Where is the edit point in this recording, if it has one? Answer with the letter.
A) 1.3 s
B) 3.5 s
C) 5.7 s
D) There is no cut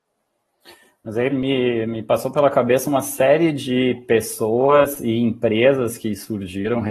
A